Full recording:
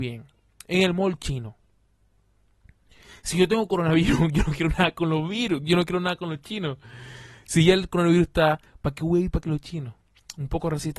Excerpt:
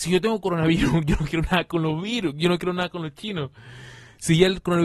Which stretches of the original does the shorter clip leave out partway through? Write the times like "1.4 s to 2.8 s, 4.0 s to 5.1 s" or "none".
none